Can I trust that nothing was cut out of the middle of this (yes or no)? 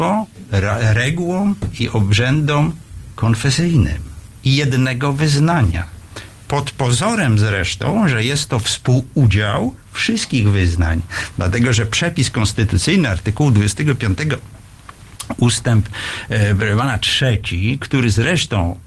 no